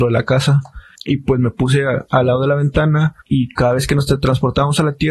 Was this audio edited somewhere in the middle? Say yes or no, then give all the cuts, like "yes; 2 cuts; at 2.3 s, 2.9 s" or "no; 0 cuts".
yes; 2 cuts; at 0.9 s, 3.2 s